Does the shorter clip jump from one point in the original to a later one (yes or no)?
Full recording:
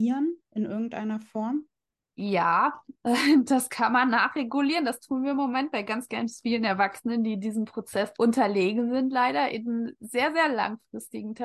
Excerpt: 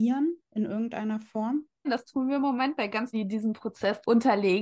yes